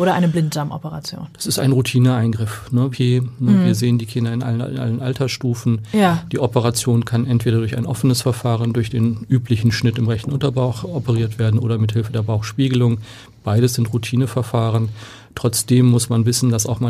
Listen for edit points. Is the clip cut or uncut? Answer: cut